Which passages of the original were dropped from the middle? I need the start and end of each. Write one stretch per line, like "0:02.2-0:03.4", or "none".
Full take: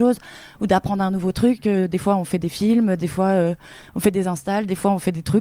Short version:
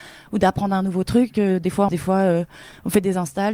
0:02.2-0:03.0